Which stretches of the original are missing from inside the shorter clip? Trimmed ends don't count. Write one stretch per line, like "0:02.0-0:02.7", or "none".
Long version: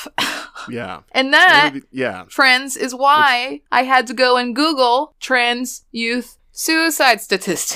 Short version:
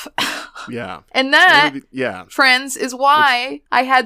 none